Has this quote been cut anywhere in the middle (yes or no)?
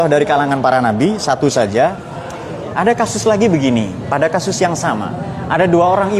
yes